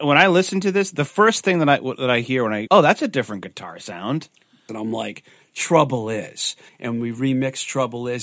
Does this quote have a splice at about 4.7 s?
yes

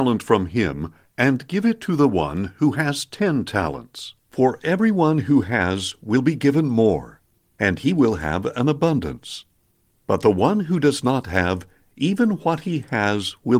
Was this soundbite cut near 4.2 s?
yes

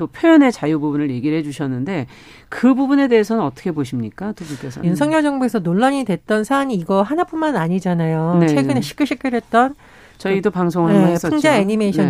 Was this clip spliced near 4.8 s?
yes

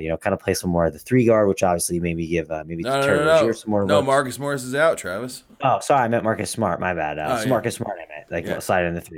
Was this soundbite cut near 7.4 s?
no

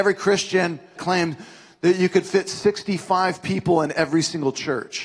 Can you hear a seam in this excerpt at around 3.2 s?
no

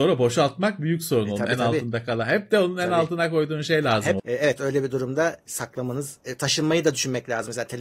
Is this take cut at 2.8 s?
no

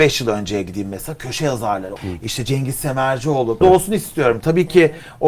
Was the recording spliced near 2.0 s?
yes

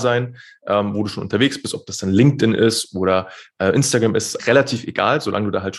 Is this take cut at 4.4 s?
yes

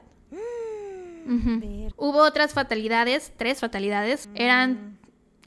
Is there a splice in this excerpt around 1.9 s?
yes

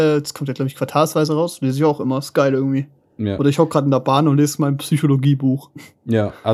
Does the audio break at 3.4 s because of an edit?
no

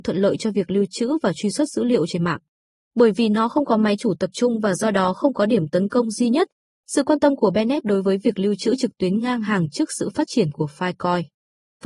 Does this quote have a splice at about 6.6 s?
yes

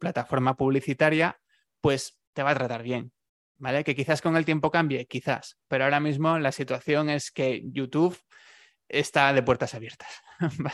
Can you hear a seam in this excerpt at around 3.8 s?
no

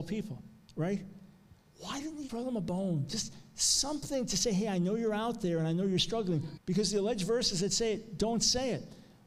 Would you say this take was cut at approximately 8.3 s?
no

